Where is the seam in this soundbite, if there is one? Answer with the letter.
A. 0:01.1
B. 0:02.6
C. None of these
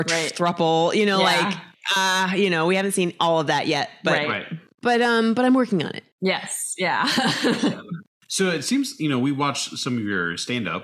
C